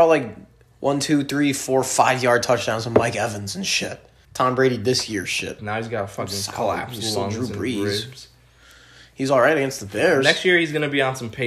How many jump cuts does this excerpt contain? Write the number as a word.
two